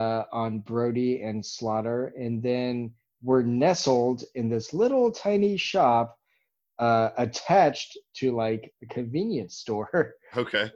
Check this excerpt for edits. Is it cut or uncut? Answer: uncut